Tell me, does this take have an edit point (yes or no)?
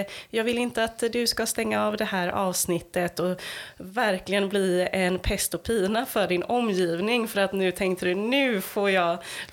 no